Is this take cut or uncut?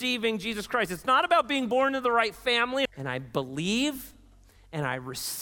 cut